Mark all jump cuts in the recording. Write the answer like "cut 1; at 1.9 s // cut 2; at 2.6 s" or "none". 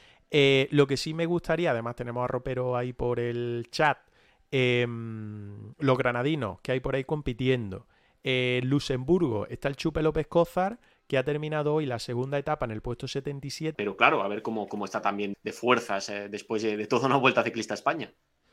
cut 1; at 13.7 s // cut 2; at 15.3 s